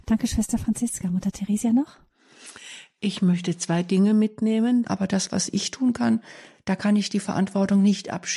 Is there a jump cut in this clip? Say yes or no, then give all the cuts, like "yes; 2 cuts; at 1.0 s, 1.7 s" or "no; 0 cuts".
yes; 1 cut; at 4.8 s